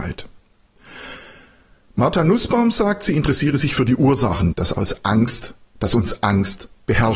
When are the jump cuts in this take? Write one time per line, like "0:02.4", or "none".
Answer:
0:04.5